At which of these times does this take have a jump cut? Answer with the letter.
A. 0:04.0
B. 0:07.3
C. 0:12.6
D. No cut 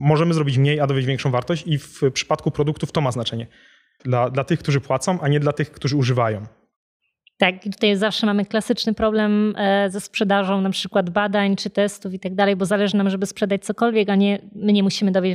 A